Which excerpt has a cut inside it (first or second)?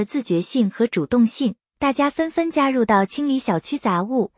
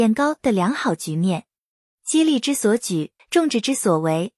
second